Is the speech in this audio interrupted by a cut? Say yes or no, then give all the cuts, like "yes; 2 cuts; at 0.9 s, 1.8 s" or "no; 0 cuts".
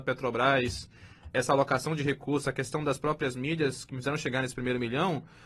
yes; 1 cut; at 1.3 s